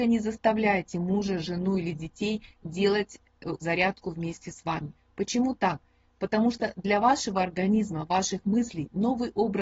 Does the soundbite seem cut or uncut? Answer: cut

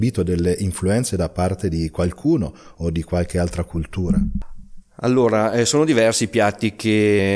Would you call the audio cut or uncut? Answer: cut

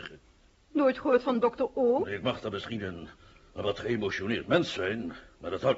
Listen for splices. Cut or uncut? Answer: cut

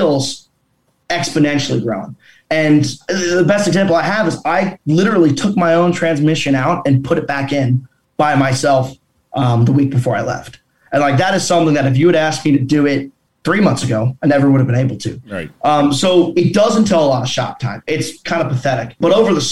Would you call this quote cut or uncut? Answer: cut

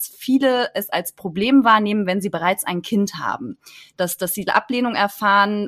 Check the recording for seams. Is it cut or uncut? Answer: uncut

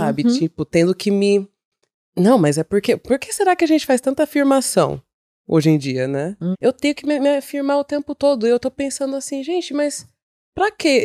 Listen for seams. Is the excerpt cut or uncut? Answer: cut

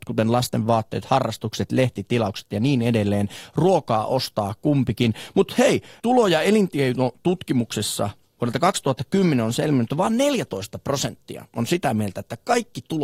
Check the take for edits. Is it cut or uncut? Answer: cut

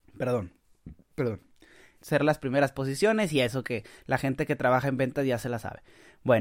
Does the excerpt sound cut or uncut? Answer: cut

